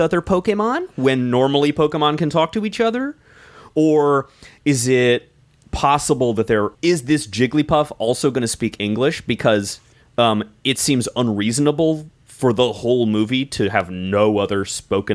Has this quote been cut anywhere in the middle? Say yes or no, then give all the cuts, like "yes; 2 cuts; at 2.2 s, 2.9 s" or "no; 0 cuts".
yes; 1 cut; at 6.7 s